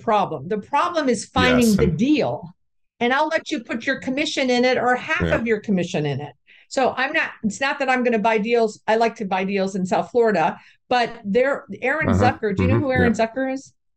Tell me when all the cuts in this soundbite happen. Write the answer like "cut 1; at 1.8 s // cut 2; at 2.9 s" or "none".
cut 1; at 1.8 s